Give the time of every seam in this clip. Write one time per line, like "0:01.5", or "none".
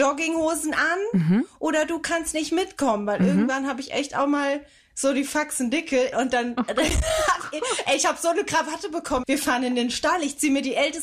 0:06.1
0:09.2